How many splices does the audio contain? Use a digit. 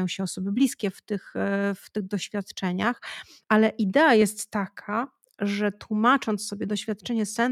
1